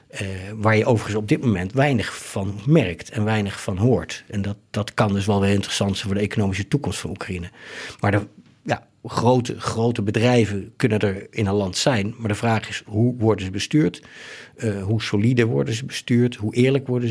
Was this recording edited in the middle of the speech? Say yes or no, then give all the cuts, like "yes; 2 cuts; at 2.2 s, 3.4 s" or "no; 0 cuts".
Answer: no; 0 cuts